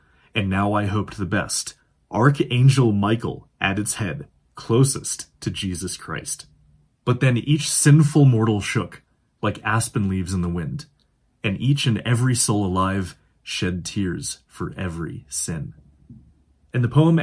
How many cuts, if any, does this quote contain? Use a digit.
1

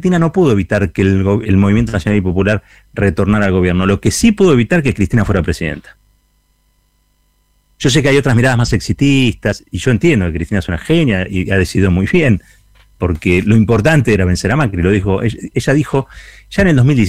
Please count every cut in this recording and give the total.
1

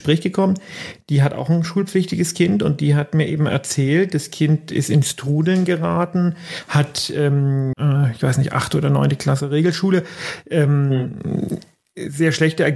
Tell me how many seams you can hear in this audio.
1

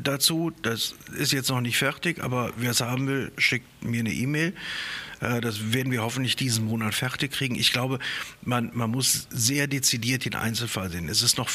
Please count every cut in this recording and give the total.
0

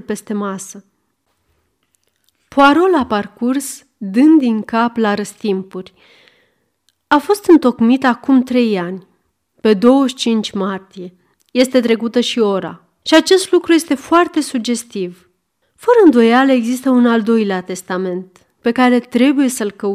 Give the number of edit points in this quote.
2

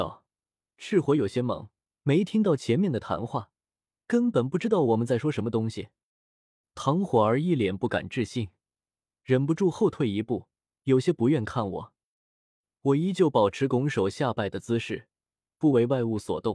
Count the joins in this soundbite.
1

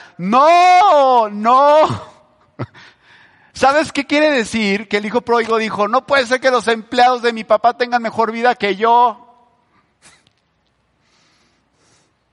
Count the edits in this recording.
0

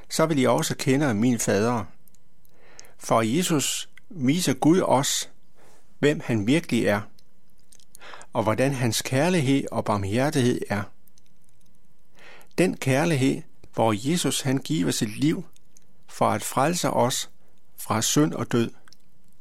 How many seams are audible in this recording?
1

